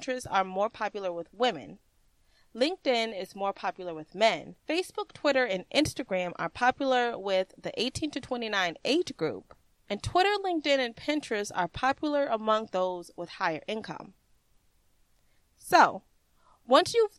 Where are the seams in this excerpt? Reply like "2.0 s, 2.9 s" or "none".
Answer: 4.6 s, 9.7 s